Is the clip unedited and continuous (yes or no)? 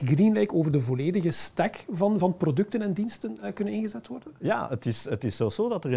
yes